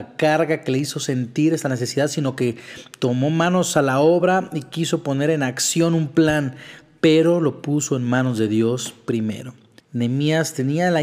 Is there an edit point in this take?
yes; 1 cut; at 9.8 s

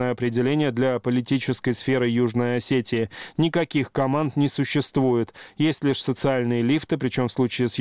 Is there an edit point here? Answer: no; 0 cuts

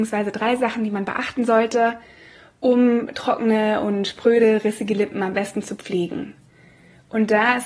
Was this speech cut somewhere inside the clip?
no; 0 cuts

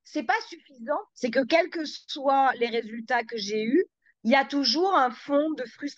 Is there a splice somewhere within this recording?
yes; 2 cuts; at 1.1 s, 4.2 s

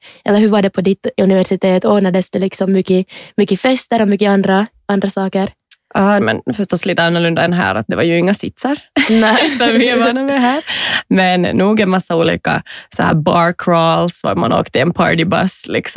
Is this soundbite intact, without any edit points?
no; 1 cut; at 6.2 s

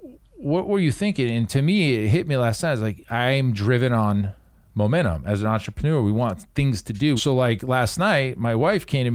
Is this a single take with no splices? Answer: no; 1 cut; at 7.2 s

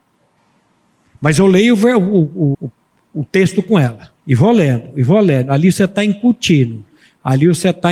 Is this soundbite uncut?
no; 2 cuts; at 2.5 s, 4.2 s

